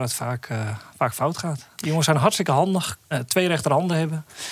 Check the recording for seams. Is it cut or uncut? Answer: cut